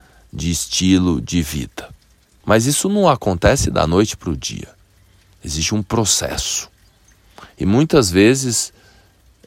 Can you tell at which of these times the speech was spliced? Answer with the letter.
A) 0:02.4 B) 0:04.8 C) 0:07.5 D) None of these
A